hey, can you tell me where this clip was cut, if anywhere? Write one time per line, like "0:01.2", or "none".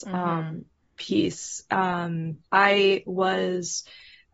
0:02.5

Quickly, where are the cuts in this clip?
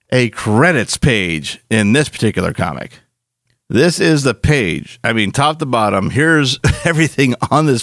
none

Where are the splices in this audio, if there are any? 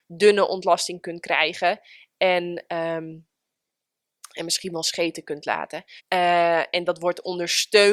0:06.0

